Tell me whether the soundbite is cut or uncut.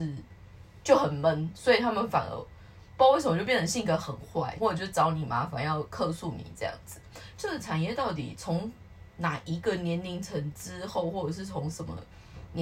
cut